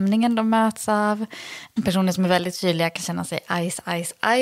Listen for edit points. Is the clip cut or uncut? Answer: uncut